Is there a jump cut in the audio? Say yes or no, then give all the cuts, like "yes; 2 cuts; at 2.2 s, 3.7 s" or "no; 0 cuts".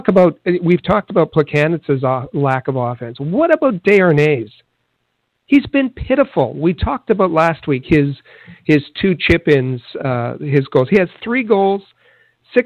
no; 0 cuts